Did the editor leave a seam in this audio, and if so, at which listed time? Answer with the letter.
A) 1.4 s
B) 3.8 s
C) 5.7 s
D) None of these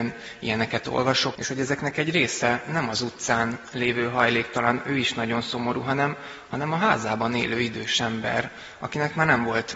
A